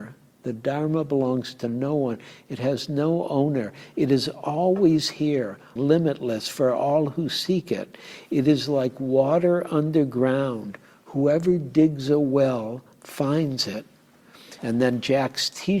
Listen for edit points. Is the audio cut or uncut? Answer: cut